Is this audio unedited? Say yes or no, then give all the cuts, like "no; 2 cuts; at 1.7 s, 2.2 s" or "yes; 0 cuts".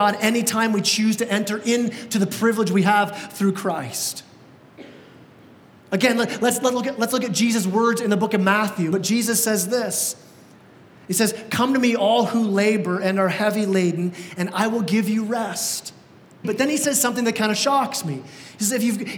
no; 2 cuts; at 8.9 s, 16.4 s